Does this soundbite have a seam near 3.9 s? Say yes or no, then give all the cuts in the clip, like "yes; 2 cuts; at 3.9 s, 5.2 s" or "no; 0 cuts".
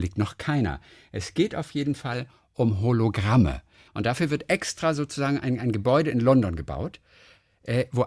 yes; 1 cut; at 3.9 s